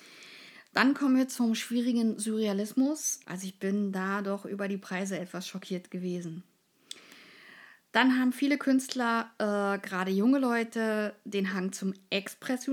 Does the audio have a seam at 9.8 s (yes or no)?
no